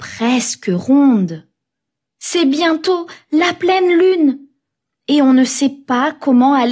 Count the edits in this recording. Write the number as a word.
zero